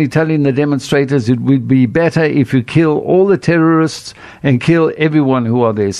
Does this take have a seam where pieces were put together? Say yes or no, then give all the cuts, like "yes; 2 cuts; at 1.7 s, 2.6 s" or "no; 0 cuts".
no; 0 cuts